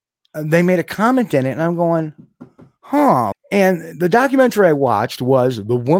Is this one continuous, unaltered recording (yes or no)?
no